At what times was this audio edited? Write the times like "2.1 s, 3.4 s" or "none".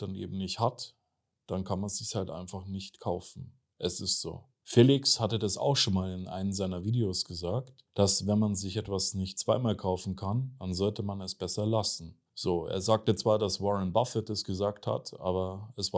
none